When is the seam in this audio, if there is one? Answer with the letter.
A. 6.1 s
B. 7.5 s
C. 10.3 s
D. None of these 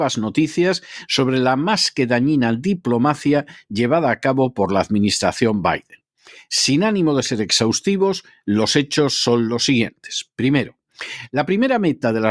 D